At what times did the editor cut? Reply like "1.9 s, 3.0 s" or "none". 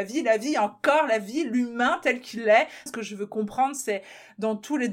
2.9 s